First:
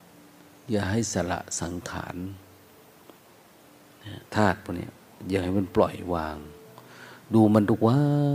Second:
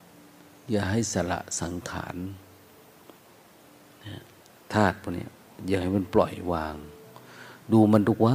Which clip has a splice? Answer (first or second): first